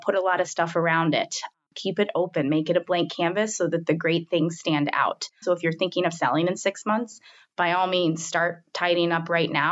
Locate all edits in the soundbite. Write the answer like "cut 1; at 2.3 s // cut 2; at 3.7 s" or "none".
cut 1; at 5.4 s